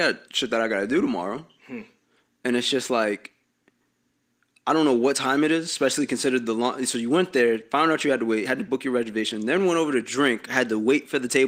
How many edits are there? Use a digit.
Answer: 0